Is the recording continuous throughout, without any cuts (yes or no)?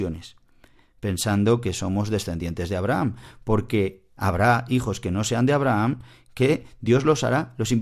yes